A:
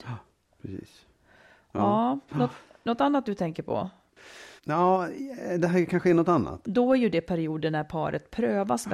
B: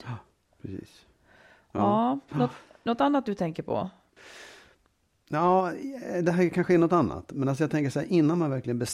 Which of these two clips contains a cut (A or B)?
A